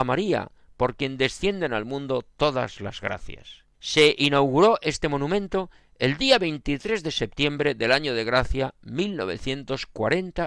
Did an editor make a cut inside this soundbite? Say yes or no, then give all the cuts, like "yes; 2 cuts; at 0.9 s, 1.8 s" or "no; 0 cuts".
yes; 1 cut; at 3.7 s